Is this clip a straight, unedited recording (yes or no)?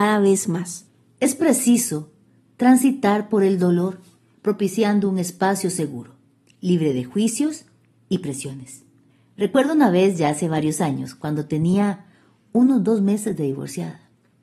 no